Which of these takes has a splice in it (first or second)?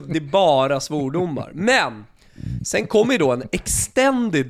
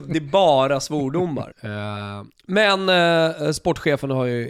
second